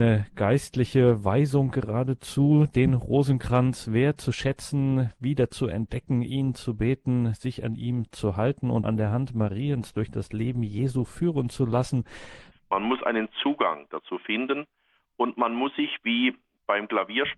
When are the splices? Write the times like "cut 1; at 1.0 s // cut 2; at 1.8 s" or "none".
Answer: cut 1; at 8.8 s // cut 2; at 12.5 s